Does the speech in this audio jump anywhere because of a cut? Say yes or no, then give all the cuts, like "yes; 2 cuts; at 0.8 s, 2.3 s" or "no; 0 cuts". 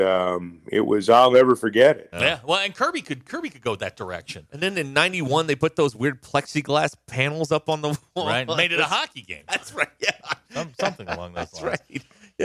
yes; 1 cut; at 2.1 s